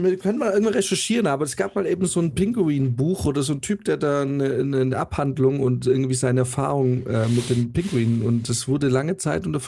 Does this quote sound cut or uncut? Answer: uncut